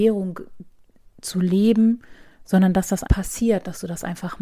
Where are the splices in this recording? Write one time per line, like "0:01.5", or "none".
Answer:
0:03.1